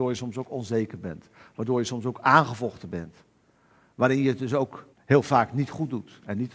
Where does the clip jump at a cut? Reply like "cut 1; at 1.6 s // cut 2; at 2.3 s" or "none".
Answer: cut 1; at 4.9 s

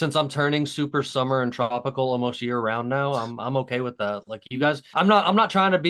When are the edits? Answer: cut 1; at 4.9 s

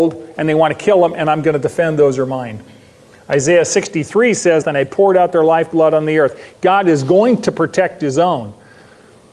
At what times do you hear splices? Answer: cut 1; at 4.6 s // cut 2; at 6.5 s

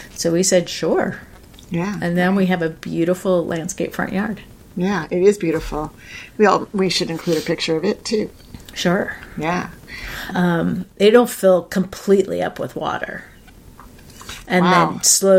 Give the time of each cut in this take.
cut 1; at 10.3 s

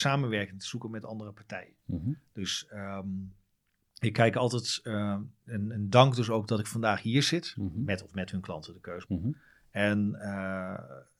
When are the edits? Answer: cut 1; at 7.5 s // cut 2; at 9.0 s

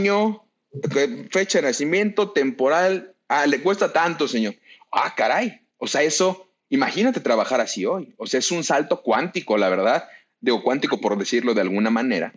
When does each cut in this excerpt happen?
none

